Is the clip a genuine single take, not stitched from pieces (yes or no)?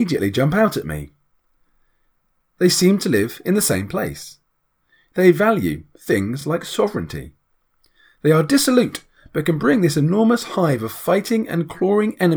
yes